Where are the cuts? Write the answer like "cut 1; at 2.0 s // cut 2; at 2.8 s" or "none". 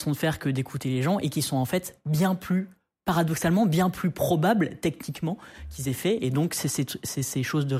none